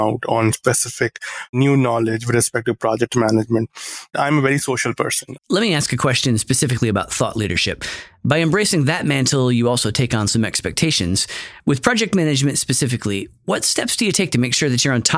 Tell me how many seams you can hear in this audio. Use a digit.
1